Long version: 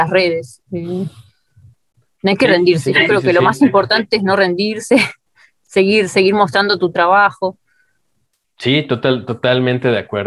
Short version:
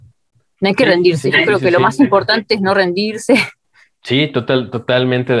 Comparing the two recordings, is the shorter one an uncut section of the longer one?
no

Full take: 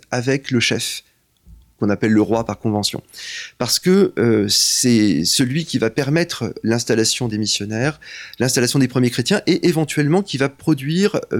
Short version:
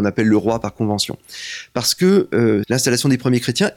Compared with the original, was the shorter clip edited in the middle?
yes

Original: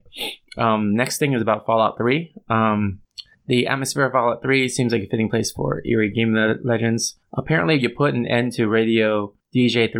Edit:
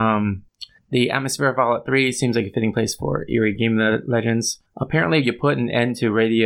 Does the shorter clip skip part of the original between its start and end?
no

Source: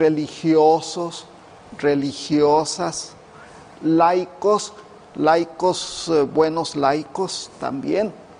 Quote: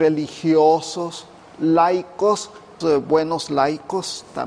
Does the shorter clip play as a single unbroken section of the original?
no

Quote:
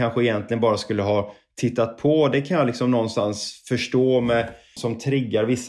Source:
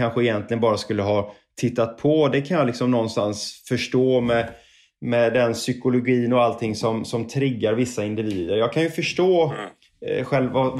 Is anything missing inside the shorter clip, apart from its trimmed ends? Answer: yes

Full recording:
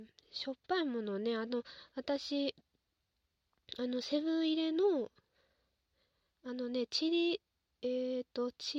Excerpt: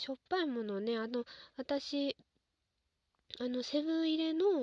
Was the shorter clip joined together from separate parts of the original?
no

